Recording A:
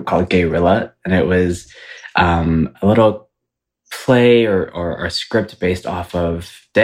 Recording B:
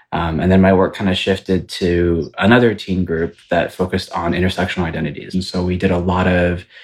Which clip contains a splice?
B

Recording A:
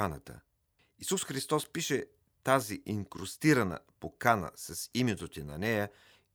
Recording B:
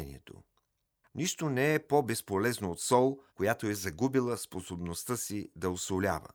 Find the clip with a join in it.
B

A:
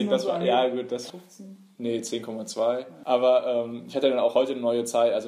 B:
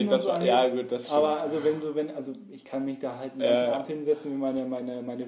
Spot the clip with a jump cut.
A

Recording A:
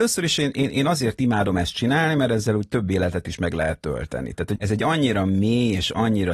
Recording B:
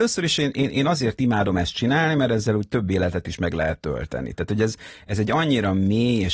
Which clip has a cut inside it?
A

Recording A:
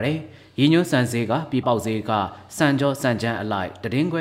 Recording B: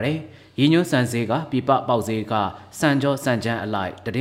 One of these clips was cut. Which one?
A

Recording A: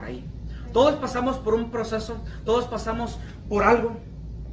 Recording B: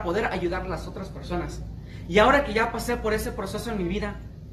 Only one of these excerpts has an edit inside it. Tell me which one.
A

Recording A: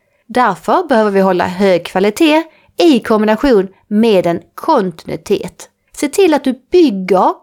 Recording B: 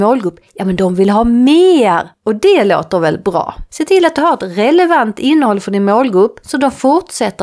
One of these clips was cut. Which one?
B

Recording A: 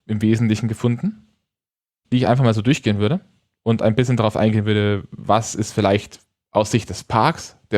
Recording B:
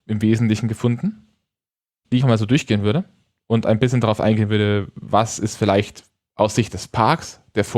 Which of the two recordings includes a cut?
B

